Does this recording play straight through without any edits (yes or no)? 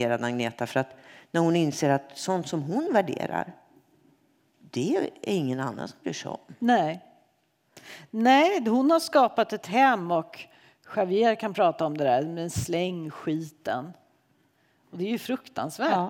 yes